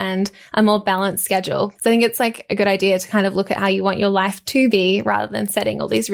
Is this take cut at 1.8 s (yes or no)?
yes